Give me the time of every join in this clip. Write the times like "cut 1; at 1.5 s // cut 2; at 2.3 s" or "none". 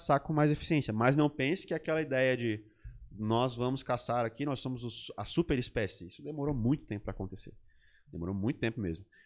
none